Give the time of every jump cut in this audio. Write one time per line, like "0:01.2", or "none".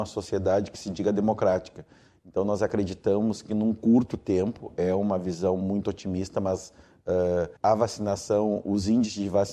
0:07.6